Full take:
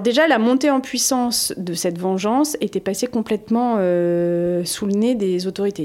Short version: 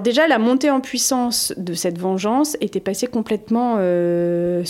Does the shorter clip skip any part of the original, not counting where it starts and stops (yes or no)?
no